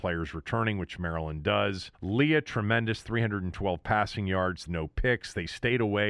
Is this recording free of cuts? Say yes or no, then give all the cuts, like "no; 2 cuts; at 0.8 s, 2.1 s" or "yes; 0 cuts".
no; 2 cuts; at 1.9 s, 4.7 s